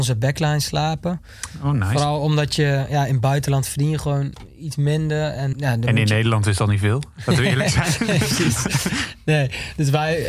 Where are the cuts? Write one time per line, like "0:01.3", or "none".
0:05.5